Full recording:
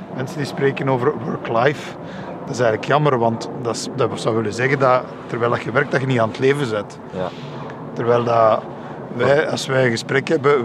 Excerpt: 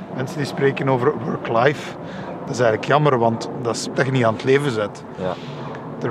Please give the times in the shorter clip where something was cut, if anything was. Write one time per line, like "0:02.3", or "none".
0:03.9